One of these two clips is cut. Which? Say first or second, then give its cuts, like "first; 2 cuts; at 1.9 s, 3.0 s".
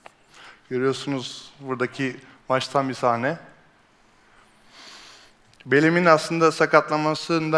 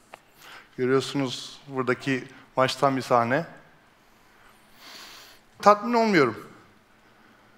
second; 1 cut; at 5.6 s